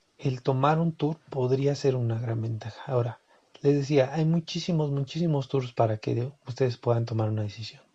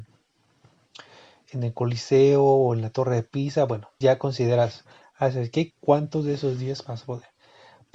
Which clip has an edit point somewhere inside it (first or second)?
second